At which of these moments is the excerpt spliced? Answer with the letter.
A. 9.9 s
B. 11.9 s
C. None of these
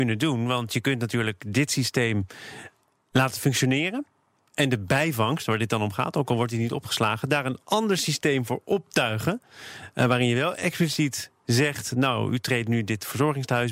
C